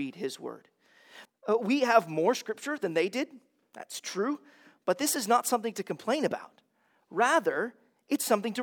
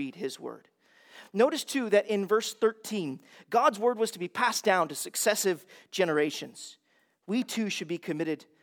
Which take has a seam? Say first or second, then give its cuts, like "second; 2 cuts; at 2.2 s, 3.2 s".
first; 1 cut; at 1.3 s